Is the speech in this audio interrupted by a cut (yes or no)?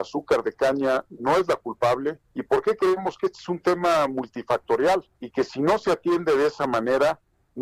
yes